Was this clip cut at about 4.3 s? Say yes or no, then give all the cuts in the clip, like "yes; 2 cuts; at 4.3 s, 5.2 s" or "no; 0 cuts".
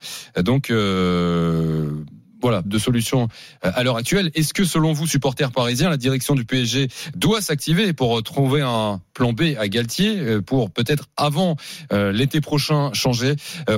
no; 1 cut; at 2.6 s